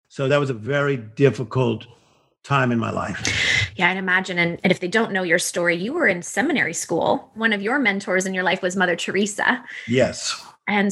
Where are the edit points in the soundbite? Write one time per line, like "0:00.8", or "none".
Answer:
0:04.6